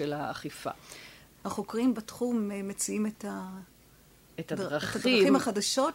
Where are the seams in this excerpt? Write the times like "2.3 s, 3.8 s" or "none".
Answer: 1.3 s